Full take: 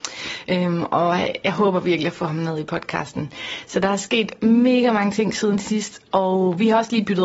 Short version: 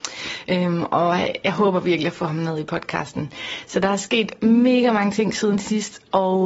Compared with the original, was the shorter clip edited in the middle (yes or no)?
no